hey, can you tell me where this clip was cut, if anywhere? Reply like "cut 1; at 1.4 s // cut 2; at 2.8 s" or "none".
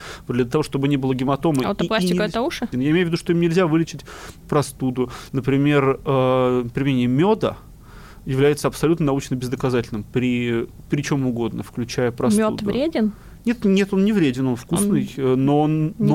cut 1; at 2.7 s // cut 2; at 5.3 s

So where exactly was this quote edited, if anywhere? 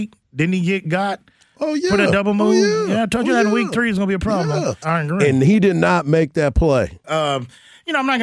cut 1; at 4.8 s // cut 2; at 7.0 s

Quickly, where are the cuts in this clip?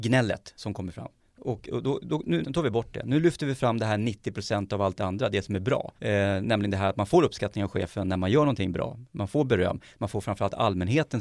cut 1; at 2.4 s // cut 2; at 6.0 s

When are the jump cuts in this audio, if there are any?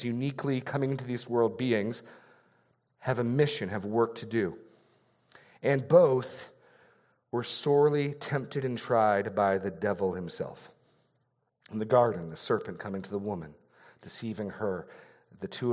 none

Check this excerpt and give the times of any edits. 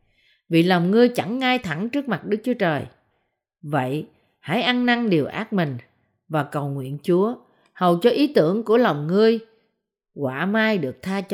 none

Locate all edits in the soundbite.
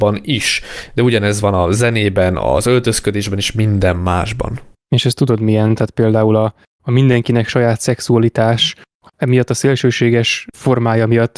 cut 1; at 6.8 s // cut 2; at 9.1 s

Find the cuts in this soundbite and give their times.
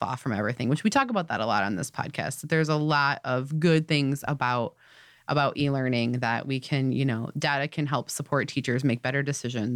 none

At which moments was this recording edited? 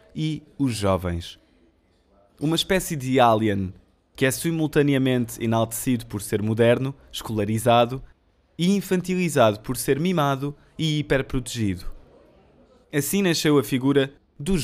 cut 1; at 2.3 s // cut 2; at 12.8 s

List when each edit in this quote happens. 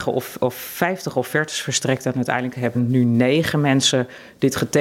cut 1; at 2.7 s

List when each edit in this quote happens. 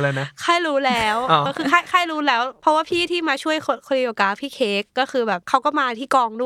cut 1; at 1.5 s

